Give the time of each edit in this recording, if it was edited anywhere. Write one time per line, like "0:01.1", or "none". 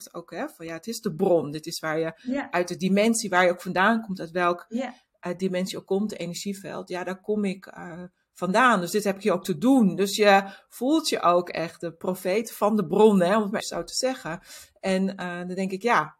0:13.6